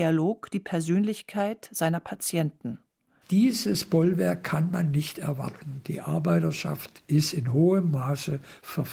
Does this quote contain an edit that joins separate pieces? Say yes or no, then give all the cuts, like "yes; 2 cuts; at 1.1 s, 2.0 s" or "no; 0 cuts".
yes; 1 cut; at 3.2 s